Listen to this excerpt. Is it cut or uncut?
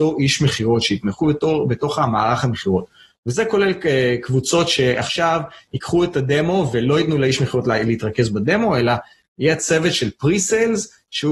uncut